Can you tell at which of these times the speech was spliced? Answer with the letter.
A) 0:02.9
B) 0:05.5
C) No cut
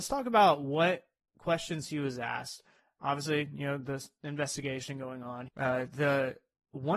B